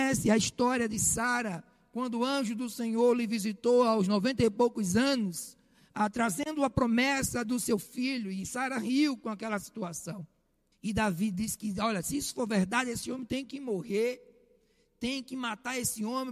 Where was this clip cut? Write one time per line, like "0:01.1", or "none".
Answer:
0:10.7